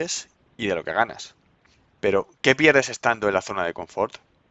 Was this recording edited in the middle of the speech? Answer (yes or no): no